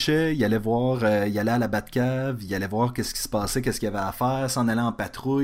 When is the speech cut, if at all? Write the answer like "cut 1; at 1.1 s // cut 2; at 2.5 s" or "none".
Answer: none